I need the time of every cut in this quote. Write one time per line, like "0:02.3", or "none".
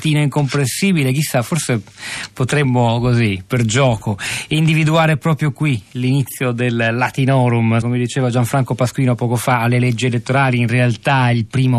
0:07.8